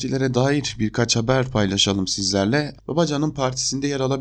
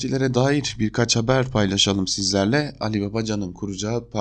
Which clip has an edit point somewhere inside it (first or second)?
first